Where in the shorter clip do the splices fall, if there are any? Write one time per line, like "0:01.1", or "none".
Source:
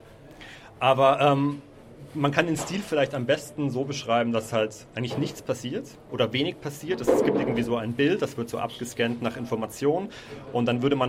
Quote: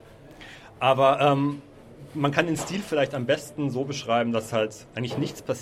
none